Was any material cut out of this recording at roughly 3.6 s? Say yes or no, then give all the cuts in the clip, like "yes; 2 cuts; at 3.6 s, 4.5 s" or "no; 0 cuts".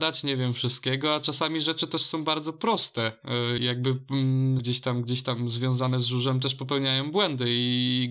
yes; 2 cuts; at 3.6 s, 4.6 s